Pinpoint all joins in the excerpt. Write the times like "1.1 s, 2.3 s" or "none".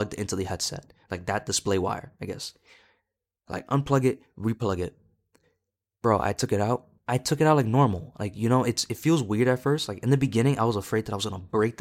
2.1 s